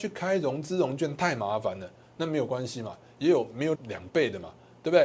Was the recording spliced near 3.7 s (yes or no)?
yes